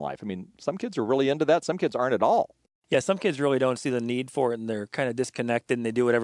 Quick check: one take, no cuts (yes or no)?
yes